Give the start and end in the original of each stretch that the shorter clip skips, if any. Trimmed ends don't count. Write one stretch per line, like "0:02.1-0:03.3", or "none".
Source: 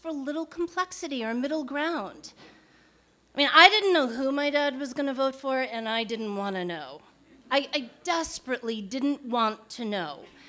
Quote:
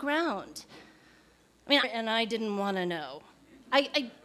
0:03.5-0:05.6